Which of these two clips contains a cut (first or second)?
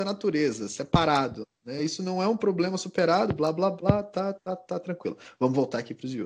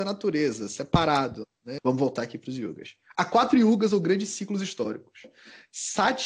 second